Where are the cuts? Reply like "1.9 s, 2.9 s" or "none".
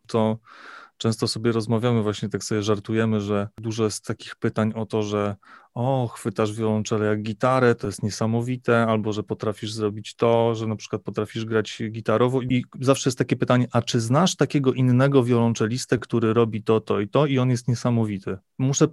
none